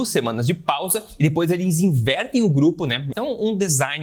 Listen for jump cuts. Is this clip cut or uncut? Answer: cut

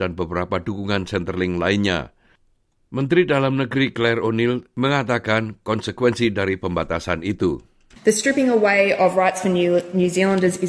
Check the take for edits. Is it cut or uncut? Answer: uncut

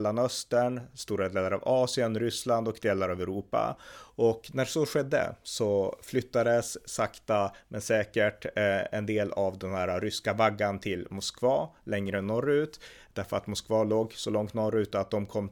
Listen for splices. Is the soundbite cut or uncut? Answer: cut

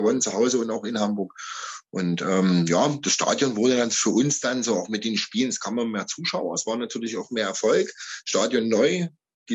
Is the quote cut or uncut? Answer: uncut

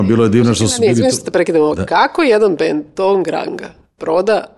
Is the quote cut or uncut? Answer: uncut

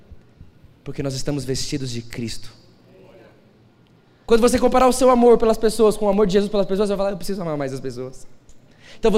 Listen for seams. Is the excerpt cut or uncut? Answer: cut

